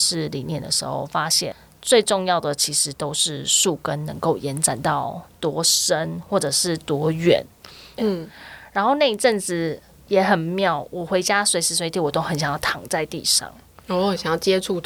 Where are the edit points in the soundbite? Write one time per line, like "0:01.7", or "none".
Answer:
0:08.0

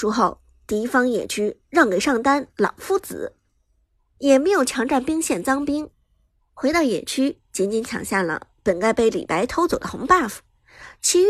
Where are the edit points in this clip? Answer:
none

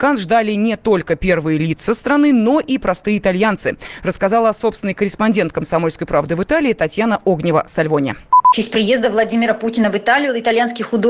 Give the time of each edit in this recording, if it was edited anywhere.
none

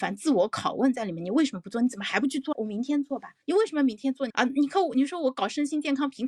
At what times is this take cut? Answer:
0:02.5
0:04.3

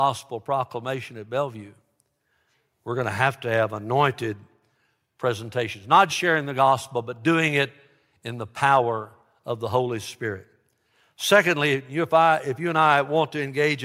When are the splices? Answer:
0:06.1

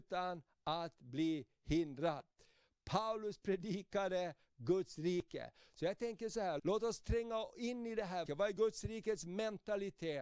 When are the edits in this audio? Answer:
0:06.6
0:08.3

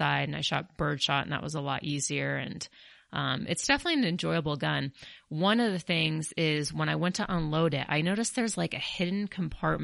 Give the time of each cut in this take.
none

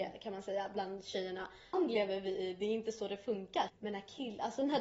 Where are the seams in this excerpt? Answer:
0:01.7
0:03.7

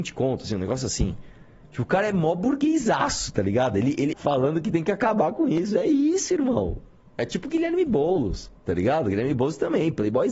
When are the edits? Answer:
0:04.1

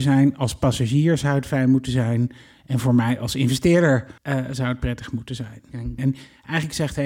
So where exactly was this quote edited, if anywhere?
0:04.2
0:06.0

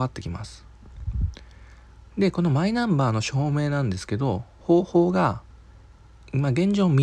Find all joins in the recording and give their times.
none

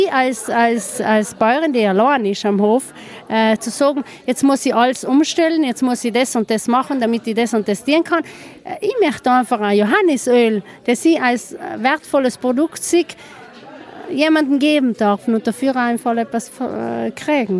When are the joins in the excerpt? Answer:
0:03.6

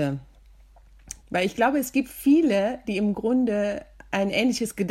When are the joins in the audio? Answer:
0:01.2

